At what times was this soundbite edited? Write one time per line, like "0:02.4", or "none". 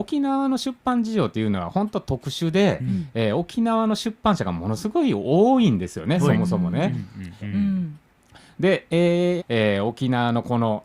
0:07.4
0:09.4

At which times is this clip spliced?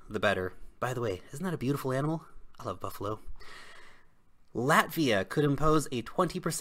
none

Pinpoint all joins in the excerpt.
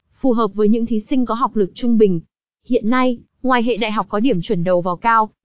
0:02.5

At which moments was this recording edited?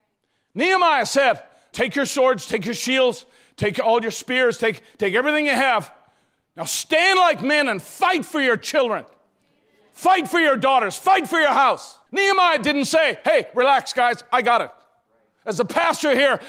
0:01.7
0:12.1

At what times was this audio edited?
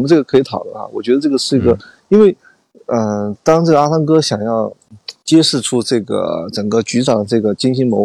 0:02.0

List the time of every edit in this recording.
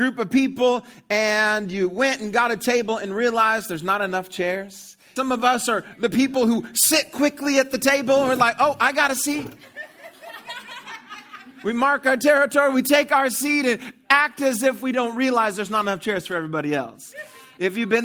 0:05.2

